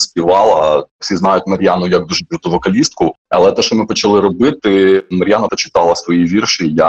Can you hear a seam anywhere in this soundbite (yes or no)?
yes